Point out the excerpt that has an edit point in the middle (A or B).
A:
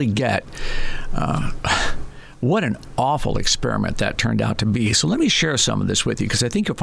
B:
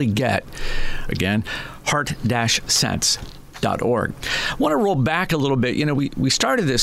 B